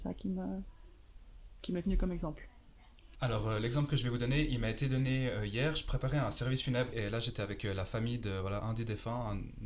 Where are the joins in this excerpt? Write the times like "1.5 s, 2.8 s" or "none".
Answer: 3.2 s, 6.9 s